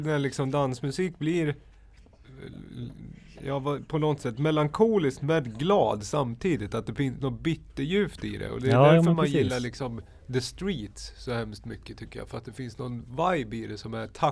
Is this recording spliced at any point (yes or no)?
no